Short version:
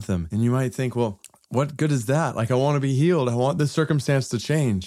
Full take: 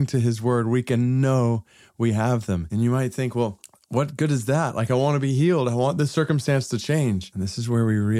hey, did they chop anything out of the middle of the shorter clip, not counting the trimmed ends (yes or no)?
no